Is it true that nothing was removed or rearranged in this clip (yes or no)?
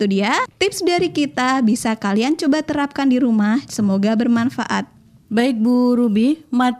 no